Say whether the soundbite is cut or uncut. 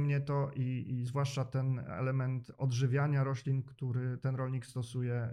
uncut